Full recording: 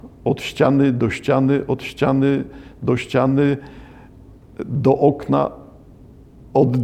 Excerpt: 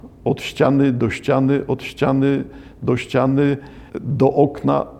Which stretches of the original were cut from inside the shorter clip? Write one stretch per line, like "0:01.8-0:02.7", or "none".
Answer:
0:03.9-0:04.5